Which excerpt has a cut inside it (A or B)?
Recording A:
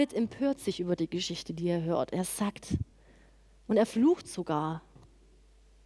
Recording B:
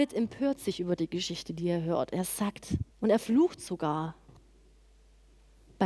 B